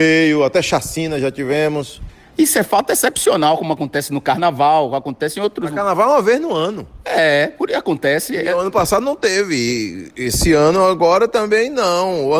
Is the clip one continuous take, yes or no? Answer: yes